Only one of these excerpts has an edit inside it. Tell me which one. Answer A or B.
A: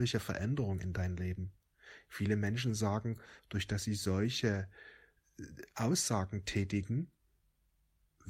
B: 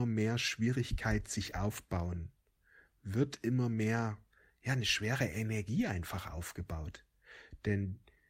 A